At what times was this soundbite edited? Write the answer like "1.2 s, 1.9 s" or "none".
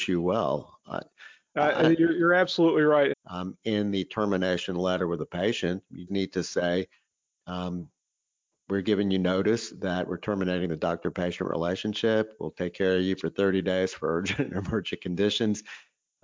3.1 s, 6.1 s